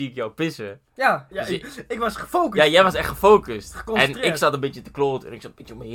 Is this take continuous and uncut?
no; 1 cut; at 1.3 s

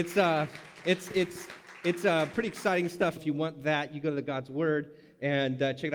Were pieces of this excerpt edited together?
yes; 1 cut; at 3.2 s

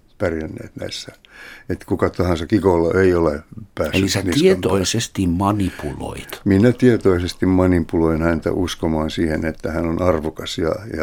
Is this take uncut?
no; 1 cut; at 2.5 s

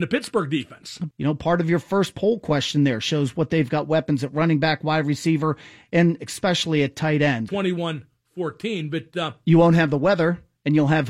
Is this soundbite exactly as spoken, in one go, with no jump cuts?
no; 2 cuts; at 1.1 s, 7.5 s

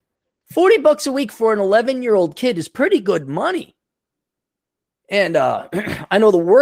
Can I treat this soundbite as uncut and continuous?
yes; 0 cuts

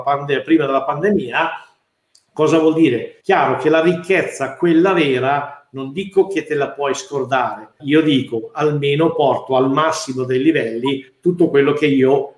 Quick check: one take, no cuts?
no; 2 cuts; at 3.2 s, 7.8 s

